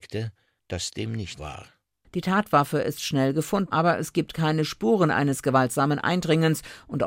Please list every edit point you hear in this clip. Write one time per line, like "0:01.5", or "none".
0:01.4
0:03.7